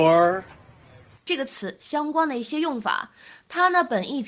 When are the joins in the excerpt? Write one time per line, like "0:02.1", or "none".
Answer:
0:01.1